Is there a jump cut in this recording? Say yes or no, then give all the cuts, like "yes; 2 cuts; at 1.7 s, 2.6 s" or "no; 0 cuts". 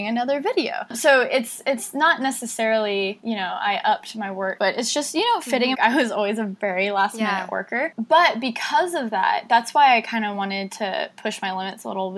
yes; 2 cuts; at 4.6 s, 5.7 s